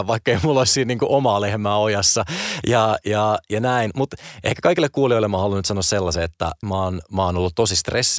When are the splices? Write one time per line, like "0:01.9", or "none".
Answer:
0:06.6